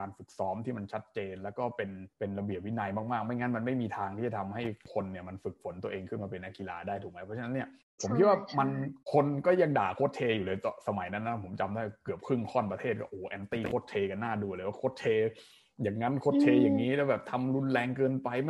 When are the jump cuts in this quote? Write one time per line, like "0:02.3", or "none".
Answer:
0:02.1
0:09.0